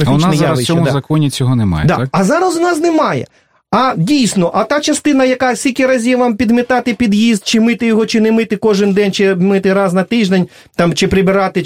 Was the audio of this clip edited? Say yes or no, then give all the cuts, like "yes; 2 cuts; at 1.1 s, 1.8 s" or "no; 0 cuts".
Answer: no; 0 cuts